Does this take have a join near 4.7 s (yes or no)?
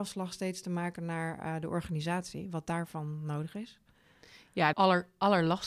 yes